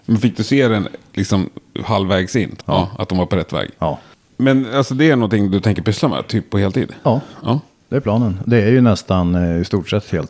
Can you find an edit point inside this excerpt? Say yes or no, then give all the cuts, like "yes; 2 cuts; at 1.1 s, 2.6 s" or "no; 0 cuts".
yes; 1 cut; at 2.6 s